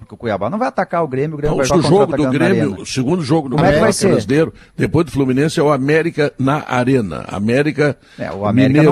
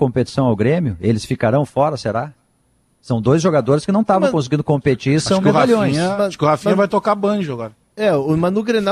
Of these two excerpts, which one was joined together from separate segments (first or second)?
first